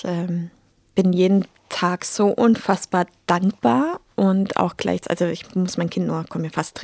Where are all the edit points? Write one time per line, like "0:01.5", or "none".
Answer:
none